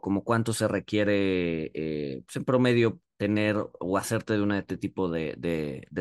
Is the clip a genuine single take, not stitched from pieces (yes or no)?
yes